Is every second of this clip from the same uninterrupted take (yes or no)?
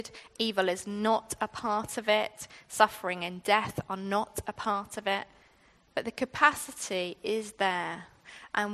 yes